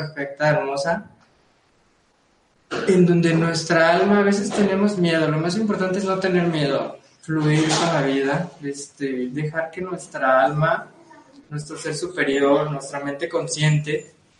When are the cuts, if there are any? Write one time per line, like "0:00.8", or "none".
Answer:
none